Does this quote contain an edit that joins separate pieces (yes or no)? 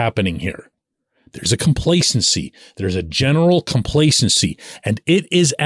no